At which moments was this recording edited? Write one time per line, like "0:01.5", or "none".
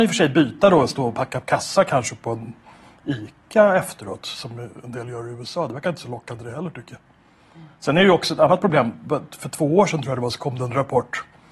none